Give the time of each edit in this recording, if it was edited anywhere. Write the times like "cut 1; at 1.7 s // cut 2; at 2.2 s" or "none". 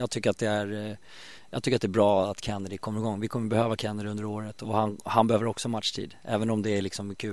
none